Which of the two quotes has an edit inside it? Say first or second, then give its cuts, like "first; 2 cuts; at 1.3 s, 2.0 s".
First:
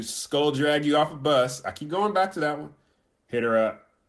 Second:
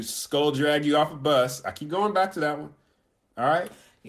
first; 1 cut; at 3.1 s